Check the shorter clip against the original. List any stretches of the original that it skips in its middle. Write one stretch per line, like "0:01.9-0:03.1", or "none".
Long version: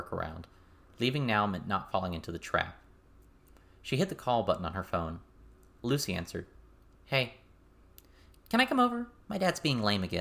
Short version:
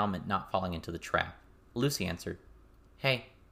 0:03.0-0:05.7